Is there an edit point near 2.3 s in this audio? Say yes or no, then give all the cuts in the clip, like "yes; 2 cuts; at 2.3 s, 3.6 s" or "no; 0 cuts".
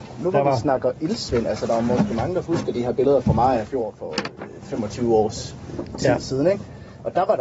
no; 0 cuts